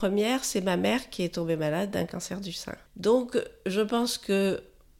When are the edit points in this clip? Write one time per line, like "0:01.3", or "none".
0:02.9